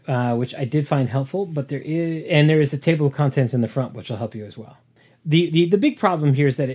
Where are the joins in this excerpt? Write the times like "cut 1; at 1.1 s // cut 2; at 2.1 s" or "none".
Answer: none